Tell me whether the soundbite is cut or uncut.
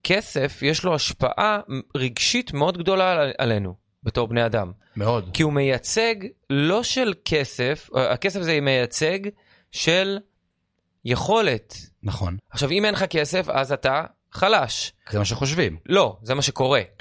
cut